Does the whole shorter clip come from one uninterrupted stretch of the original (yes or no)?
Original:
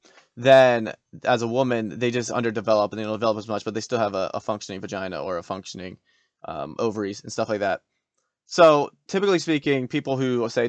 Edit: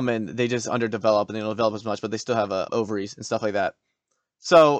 no